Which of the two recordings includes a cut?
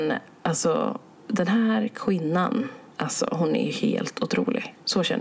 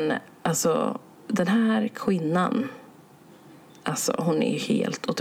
first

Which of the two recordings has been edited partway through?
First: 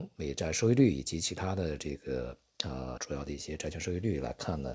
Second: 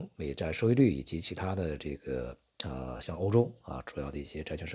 first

